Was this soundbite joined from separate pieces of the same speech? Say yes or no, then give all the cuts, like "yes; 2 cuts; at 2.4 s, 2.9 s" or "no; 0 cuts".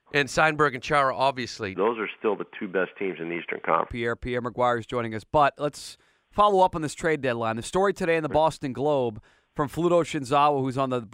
yes; 2 cuts; at 1.8 s, 3.9 s